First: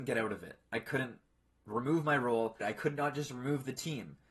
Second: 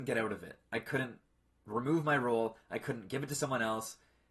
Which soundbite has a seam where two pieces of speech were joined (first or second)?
first